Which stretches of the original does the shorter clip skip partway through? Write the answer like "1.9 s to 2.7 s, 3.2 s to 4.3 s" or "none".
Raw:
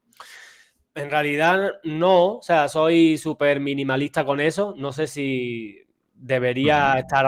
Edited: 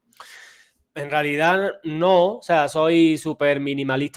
none